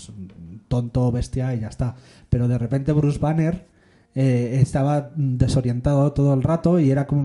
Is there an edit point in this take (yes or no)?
no